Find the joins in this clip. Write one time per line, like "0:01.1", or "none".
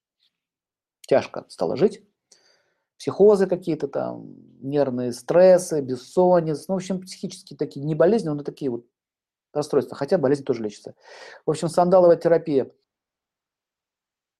none